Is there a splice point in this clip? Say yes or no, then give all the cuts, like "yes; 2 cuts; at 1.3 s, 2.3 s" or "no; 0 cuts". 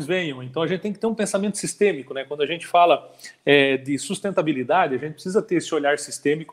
no; 0 cuts